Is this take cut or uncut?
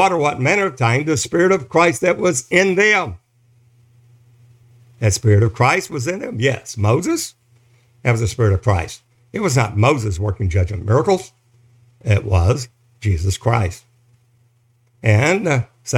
uncut